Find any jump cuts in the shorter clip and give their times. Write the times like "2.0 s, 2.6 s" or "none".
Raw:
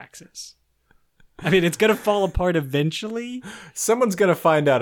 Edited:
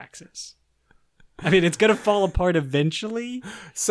none